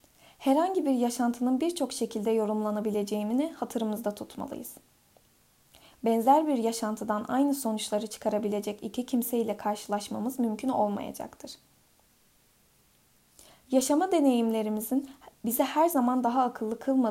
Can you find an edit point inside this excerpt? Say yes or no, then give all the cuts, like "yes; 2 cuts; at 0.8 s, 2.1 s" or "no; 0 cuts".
no; 0 cuts